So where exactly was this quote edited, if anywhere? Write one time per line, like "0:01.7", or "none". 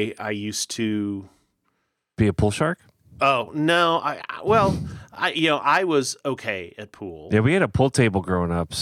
none